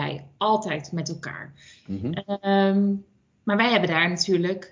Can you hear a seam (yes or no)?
no